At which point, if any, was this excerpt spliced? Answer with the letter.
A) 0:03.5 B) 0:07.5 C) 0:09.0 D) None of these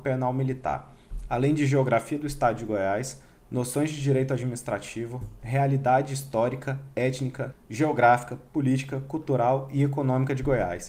B